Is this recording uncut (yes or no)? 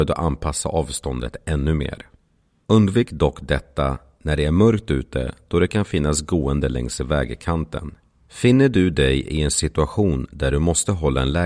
no